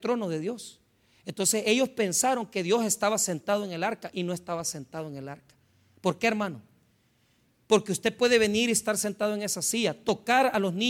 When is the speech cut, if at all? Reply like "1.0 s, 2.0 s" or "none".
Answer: none